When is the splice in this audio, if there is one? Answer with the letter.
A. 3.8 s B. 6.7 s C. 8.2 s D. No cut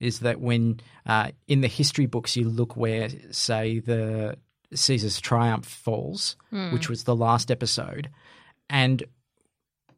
D